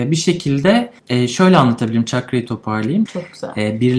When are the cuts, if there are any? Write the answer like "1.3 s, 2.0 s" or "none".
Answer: 1.0 s, 3.1 s